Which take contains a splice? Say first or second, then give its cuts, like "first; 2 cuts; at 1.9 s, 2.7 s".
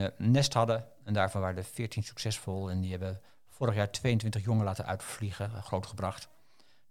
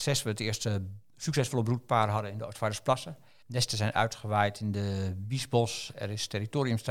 second; 1 cut; at 3.4 s